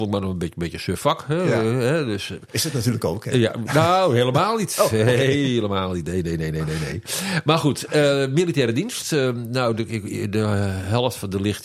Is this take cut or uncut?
uncut